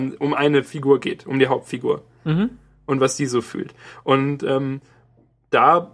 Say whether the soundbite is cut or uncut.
uncut